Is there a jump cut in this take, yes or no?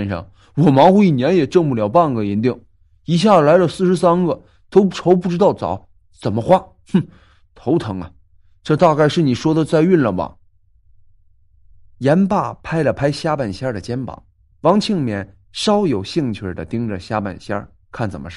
yes